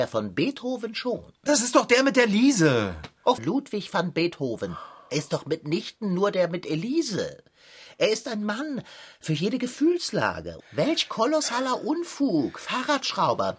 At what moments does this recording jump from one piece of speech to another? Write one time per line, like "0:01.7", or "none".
0:03.4
0:10.6